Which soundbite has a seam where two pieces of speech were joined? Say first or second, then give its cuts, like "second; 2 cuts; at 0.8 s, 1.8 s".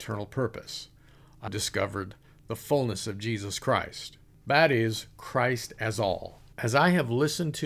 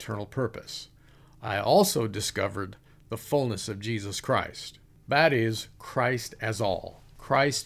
first; 2 cuts; at 1.5 s, 6.5 s